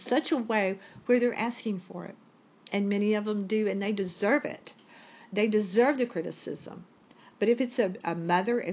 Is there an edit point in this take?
no; 0 cuts

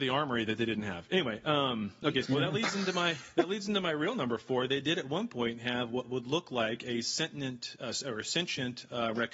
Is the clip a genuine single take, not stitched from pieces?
no; 1 cut; at 2.2 s

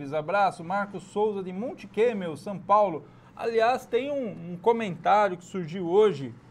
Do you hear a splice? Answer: no; 0 cuts

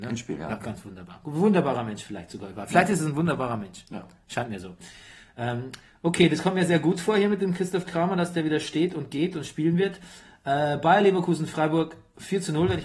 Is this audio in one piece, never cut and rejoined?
yes; 0 cuts

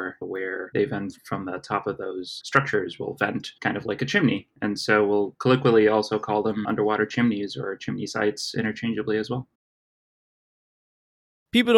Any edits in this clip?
yes; 1 cut; at 6.7 s

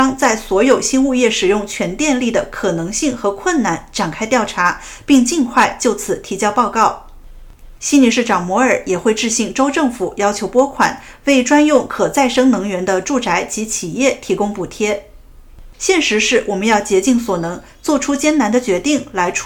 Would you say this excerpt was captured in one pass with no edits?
no; 2 cuts; at 8.1 s, 15.7 s

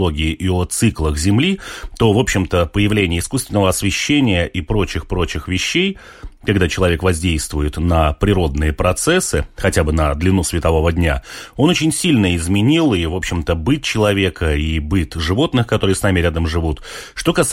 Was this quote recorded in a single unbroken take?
yes; 0 cuts

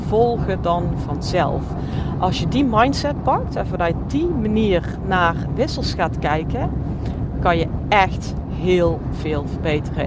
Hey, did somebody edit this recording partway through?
no; 0 cuts

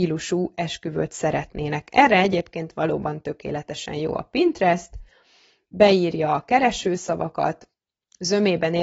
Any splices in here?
no; 0 cuts

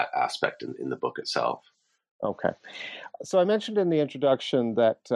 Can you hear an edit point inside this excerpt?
no; 0 cuts

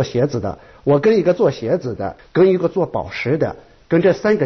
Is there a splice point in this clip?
yes; 1 cut; at 2.2 s

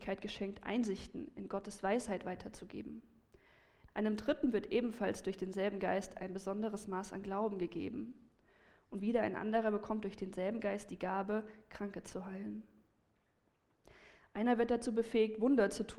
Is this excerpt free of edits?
no; 1 cut; at 3.9 s

